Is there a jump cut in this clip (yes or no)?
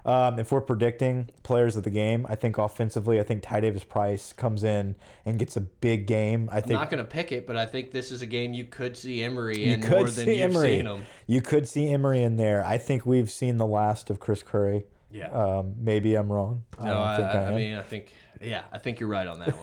no